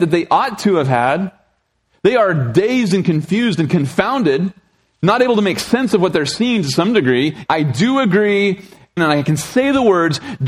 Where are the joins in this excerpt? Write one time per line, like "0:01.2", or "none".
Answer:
0:07.5
0:09.0